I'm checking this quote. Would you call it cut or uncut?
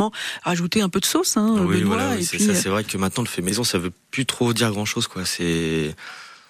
uncut